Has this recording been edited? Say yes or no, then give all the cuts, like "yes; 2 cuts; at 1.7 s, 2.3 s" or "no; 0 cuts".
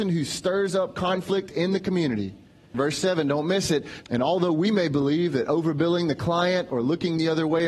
yes; 2 cuts; at 2.7 s, 4.0 s